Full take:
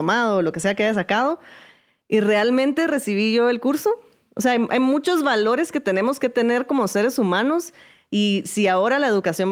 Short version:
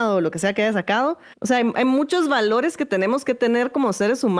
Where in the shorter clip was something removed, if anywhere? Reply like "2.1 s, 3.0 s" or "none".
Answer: 1.3 s